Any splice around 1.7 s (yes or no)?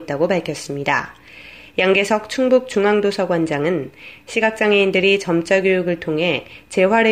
yes